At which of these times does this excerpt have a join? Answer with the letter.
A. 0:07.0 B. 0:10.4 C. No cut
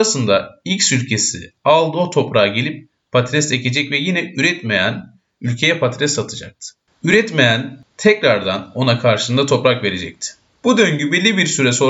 C